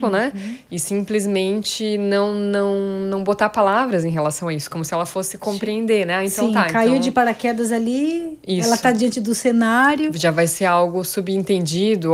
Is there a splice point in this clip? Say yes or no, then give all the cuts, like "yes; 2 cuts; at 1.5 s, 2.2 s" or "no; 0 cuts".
no; 0 cuts